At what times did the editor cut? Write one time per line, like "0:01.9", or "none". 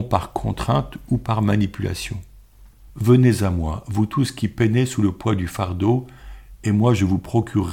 0:02.9